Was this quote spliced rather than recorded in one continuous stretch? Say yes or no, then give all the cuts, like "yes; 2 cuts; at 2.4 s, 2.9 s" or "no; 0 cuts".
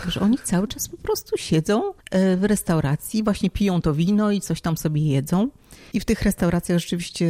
yes; 2 cuts; at 2.0 s, 5.9 s